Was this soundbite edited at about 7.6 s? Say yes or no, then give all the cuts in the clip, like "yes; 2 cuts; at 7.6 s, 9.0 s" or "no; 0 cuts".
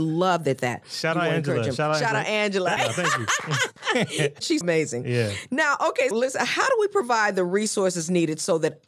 no; 3 cuts; at 2.8 s, 4.6 s, 6.1 s